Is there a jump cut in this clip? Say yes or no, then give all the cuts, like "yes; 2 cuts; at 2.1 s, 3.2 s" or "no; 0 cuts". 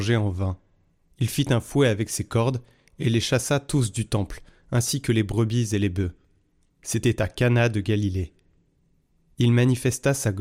yes; 2 cuts; at 1.1 s, 6.8 s